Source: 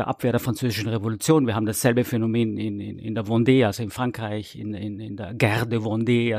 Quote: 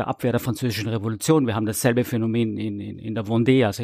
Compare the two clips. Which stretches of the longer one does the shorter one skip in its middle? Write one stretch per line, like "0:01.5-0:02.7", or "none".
none